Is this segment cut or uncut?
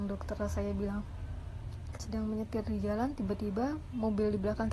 cut